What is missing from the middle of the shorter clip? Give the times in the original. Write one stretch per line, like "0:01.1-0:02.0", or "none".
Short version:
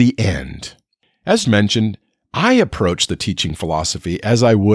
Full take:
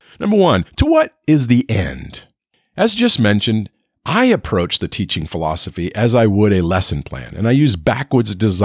0:02.9-0:03.2